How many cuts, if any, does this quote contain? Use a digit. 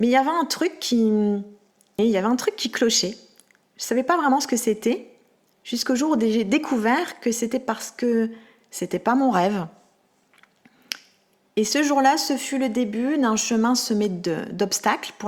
1